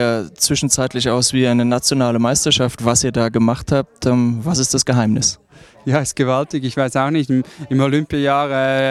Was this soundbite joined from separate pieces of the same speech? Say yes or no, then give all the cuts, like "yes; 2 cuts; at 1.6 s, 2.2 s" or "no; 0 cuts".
no; 0 cuts